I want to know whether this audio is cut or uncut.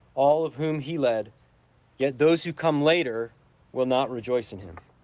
uncut